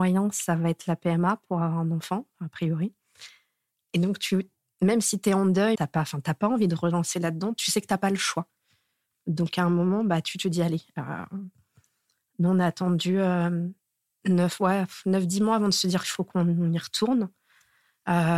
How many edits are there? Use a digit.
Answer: 1